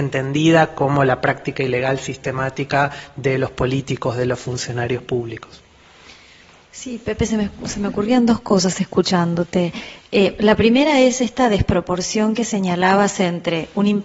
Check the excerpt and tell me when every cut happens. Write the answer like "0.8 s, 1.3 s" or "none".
none